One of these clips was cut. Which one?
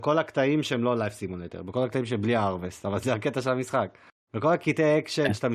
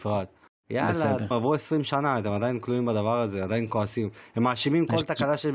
second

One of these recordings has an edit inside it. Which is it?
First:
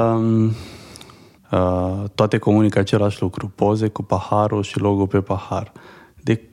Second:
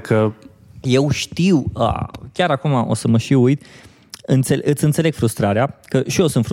first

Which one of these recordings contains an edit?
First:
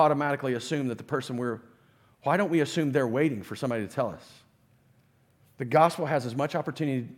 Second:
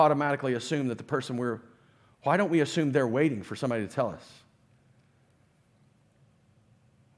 first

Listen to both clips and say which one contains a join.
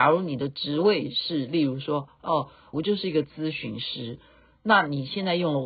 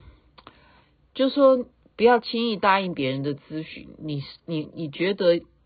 first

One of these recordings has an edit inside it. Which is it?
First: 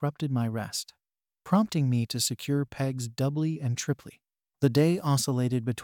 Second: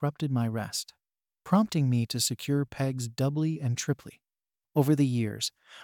first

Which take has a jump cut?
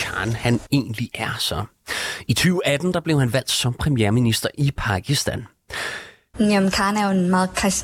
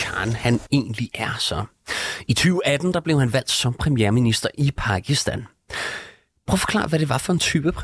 first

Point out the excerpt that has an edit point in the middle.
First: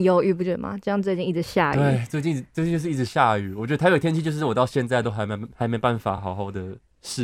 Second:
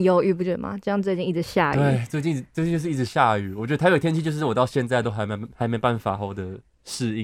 second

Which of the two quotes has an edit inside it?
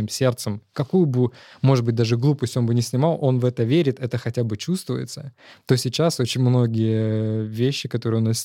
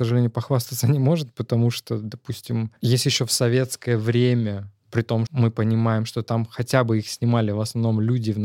second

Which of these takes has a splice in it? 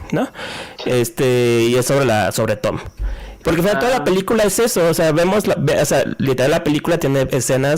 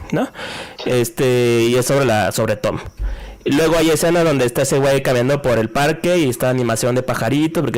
first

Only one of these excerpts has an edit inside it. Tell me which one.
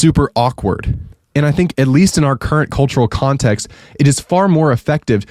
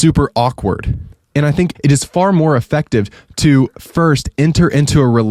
second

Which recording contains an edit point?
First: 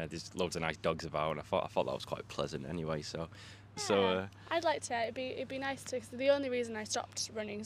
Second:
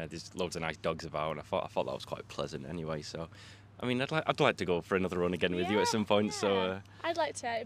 first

